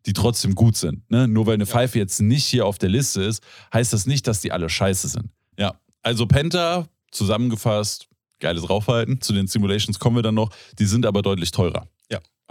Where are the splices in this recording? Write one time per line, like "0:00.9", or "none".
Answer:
0:05.5
0:07.0
0:09.2